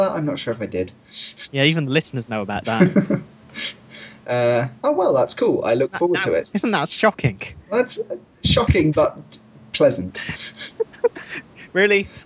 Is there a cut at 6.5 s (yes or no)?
yes